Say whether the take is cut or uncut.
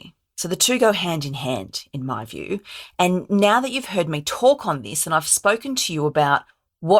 uncut